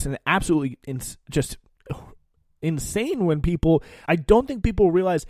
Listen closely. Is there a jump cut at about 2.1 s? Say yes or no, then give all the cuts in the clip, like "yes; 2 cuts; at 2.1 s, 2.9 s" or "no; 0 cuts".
no; 1 cut; at 4.1 s